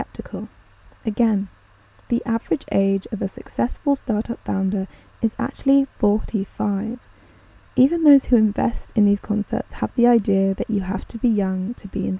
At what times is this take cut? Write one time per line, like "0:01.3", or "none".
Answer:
none